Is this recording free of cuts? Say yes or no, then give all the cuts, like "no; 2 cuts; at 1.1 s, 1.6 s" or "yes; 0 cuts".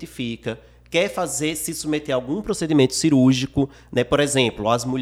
yes; 0 cuts